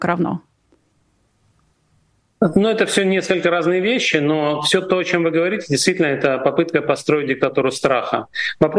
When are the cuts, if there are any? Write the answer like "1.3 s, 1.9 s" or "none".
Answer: none